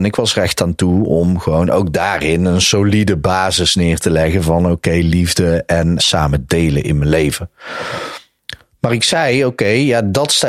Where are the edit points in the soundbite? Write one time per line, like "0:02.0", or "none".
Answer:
0:06.0